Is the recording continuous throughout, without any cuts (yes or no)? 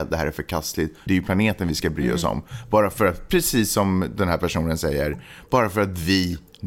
no